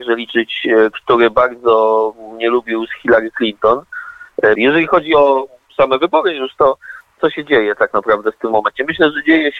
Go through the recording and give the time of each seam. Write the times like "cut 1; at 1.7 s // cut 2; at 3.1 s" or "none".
cut 1; at 4.6 s // cut 2; at 7.2 s